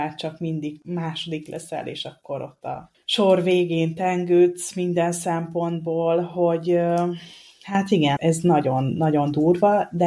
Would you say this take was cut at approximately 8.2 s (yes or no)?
yes